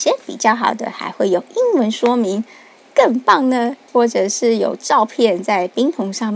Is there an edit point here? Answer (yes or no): yes